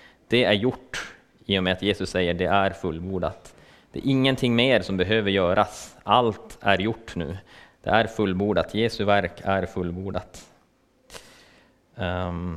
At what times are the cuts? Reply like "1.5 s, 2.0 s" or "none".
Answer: none

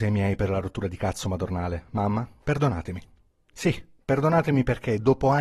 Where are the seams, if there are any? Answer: 2.4 s

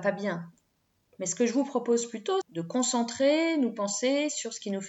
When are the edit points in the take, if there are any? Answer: 2.4 s

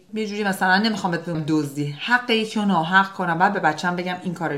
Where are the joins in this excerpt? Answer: 1.3 s

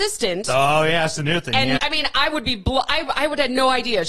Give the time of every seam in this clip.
1.8 s

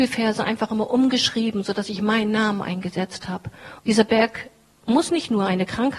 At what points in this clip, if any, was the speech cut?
3.8 s

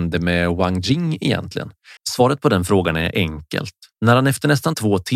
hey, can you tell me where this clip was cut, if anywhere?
2.0 s, 3.9 s

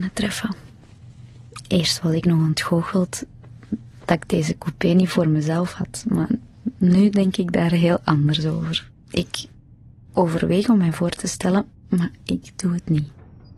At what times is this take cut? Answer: 9.0 s, 11.8 s

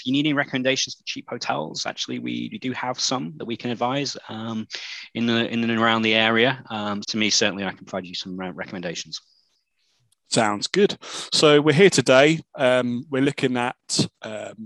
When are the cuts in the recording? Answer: 7.0 s

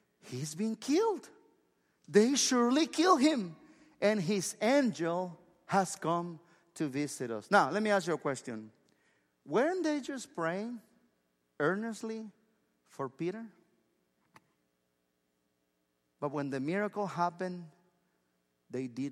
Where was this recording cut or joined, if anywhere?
none

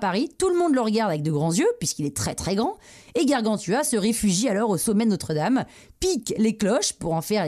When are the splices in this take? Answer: none

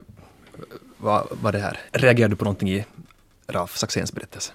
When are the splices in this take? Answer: 1.9 s

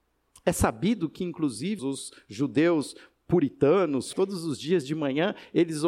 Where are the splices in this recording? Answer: 1.8 s, 4.1 s

